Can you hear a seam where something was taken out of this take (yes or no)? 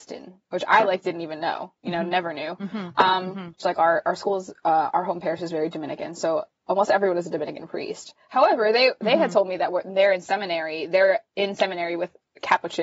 yes